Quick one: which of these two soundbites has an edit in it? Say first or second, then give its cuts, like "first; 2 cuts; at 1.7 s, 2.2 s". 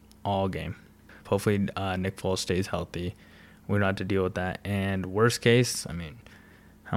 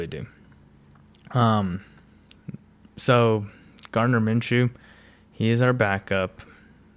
first; 1 cut; at 1.3 s